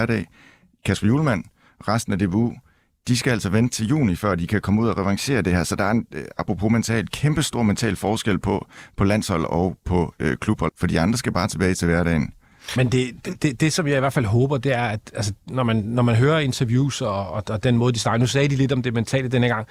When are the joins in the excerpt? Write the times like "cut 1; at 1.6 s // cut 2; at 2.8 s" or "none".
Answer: cut 1; at 10.7 s